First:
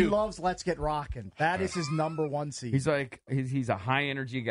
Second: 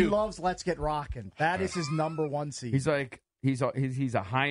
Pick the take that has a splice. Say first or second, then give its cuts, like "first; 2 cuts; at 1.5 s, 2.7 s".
first; 1 cut; at 3.3 s